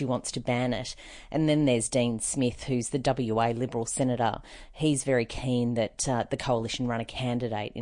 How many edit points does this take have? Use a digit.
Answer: 0